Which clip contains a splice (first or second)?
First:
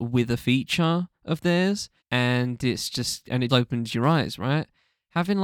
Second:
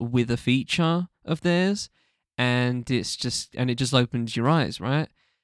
first